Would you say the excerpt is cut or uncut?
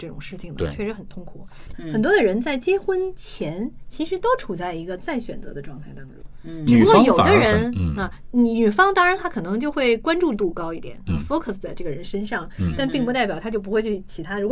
uncut